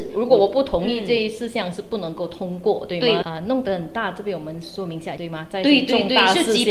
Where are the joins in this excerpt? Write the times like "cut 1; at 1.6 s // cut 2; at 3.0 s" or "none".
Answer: cut 1; at 3.2 s // cut 2; at 5.2 s